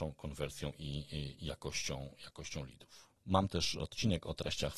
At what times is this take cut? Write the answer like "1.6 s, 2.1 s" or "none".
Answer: 3.2 s

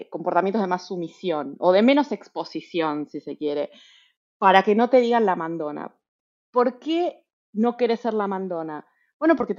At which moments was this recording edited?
none

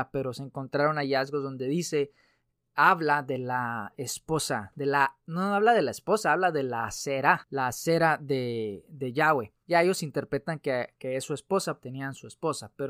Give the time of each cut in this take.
11.8 s

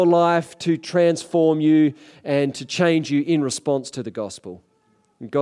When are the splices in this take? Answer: none

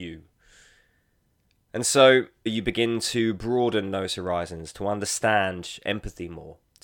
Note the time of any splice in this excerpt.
2.5 s

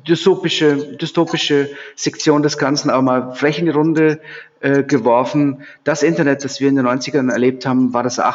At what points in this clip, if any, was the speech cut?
none

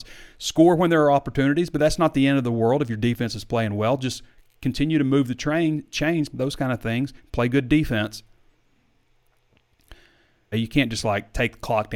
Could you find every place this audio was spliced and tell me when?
6.3 s, 10.5 s

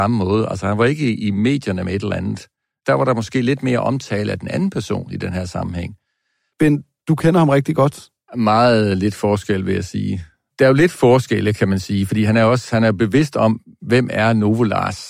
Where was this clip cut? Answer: 6.5 s, 8.3 s

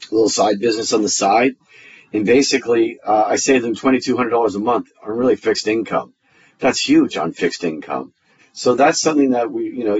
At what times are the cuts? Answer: 8.4 s

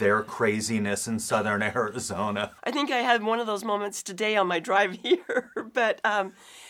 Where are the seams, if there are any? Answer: 2.6 s

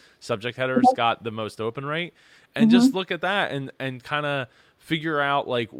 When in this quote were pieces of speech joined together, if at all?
none

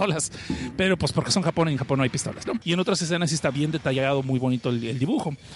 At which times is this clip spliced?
2.6 s

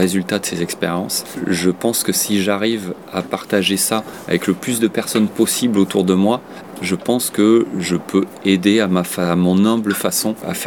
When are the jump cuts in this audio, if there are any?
none

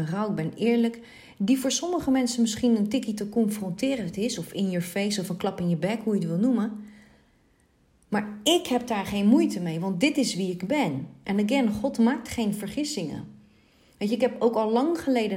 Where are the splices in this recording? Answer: none

